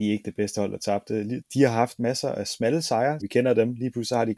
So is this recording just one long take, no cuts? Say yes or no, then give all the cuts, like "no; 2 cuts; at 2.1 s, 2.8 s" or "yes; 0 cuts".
no; 2 cuts; at 1.4 s, 3.2 s